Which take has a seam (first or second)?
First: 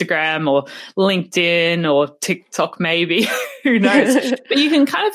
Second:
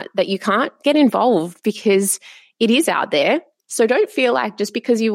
second